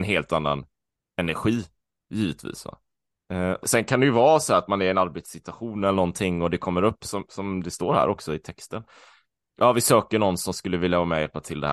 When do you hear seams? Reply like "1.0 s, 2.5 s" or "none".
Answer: 3.6 s